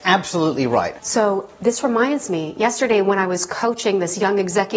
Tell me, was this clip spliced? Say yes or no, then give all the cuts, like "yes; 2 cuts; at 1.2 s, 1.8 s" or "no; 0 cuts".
yes; 1 cut; at 1.0 s